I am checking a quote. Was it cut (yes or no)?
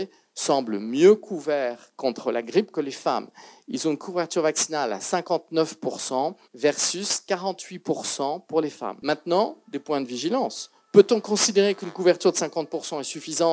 yes